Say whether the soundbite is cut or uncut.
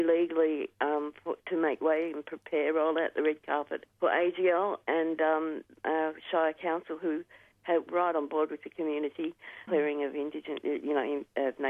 cut